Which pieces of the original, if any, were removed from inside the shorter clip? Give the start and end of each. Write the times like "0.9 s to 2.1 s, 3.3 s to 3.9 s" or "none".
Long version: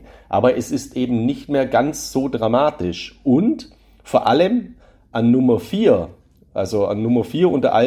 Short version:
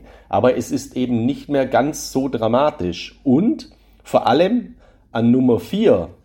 none